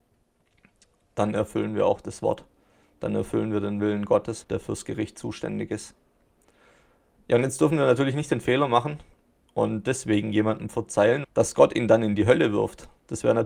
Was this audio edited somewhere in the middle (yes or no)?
yes